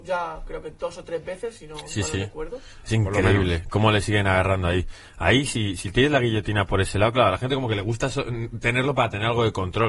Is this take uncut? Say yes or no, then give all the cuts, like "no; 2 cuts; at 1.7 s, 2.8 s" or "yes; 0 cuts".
yes; 0 cuts